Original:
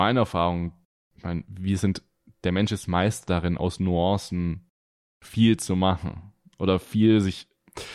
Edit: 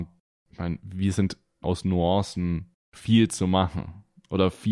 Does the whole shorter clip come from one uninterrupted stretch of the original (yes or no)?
no